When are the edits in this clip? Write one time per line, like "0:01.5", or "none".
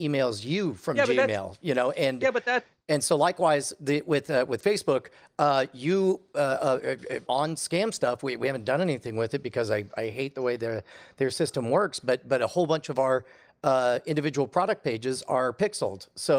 0:07.3